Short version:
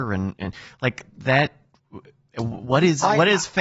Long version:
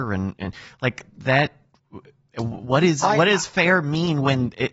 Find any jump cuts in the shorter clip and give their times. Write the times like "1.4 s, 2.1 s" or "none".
none